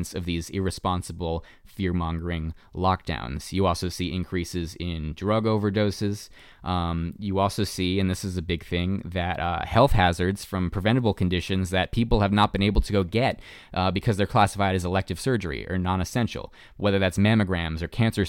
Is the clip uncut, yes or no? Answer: yes